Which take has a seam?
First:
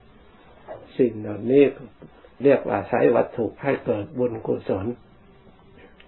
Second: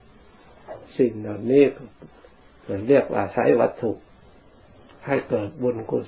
first; 2 cuts; at 2.4 s, 3.6 s

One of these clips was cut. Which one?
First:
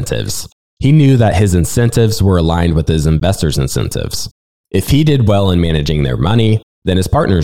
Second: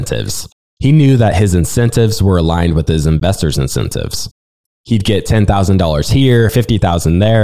second; 2 cuts; at 4.7 s, 6.5 s

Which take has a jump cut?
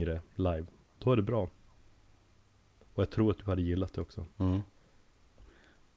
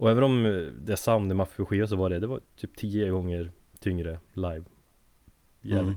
first; 2 cuts; at 0.9 s, 4.3 s

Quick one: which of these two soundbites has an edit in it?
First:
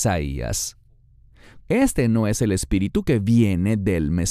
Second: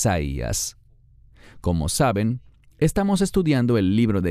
first; 1 cut; at 1.6 s

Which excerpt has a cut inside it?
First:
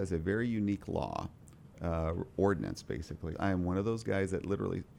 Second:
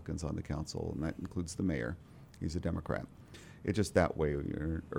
first; 1 cut; at 3.3 s

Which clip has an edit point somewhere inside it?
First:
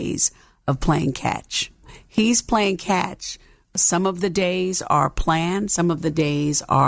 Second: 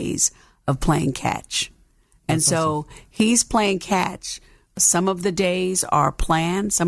first; 1 cut; at 1.8 s

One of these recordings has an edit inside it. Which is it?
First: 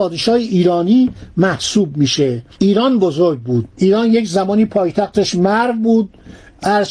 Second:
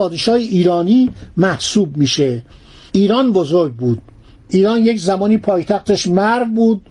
first; 2 cuts; at 2.5 s, 3.7 s

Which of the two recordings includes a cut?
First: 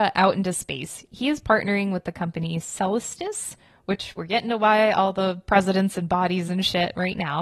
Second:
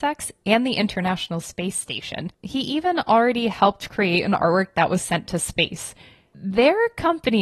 second; 1 cut; at 6.3 s

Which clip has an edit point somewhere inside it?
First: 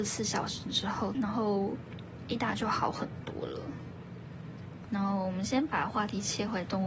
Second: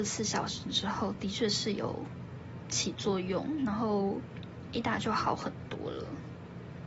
first; 2 cuts; at 1.1 s, 4.8 s

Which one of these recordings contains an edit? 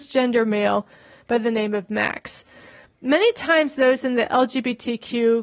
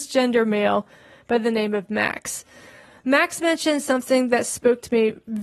first; 1 cut; at 2.8 s

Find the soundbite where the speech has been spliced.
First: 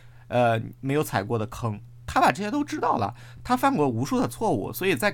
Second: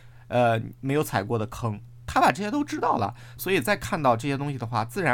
second; 1 cut; at 3.4 s

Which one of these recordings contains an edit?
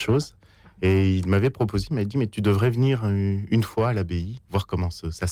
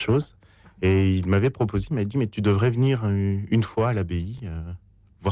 first; 1 cut; at 4.4 s

